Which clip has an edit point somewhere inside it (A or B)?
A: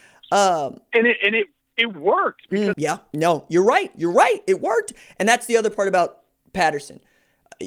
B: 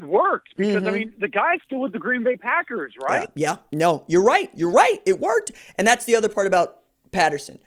A